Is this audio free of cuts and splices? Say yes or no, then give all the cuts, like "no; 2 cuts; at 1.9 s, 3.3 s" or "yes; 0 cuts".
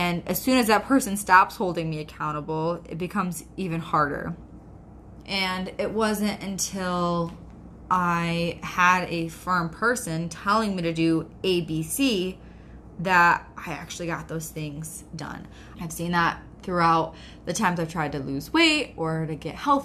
no; 2 cuts; at 5.2 s, 15.7 s